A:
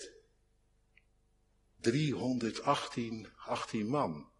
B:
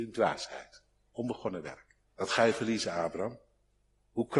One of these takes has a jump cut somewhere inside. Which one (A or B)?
B